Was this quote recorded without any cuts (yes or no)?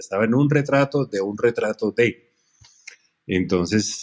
yes